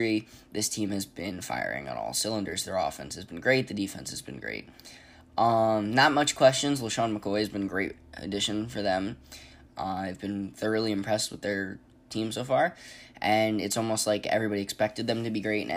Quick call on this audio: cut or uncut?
cut